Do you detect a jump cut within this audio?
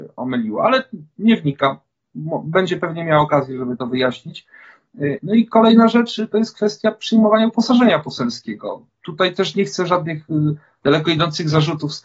no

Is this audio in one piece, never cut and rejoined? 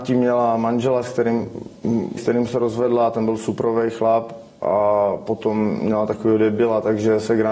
no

